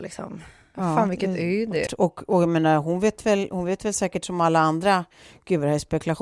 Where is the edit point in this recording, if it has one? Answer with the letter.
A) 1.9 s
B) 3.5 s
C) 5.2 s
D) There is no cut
A